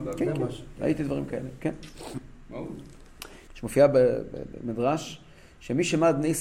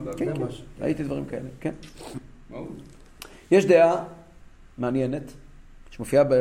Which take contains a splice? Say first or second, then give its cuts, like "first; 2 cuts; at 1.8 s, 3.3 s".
first; 1 cut; at 3.5 s